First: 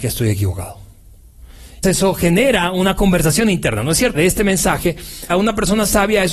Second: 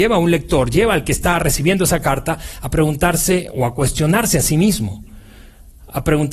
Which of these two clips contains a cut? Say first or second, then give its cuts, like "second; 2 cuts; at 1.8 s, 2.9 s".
first; 3 cuts; at 1.8 s, 4.1 s, 5.3 s